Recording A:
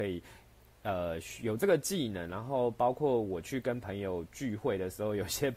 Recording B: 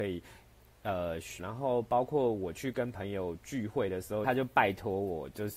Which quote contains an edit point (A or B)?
B